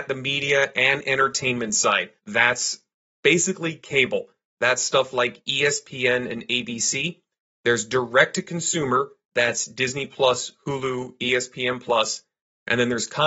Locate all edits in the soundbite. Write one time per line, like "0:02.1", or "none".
0:02.2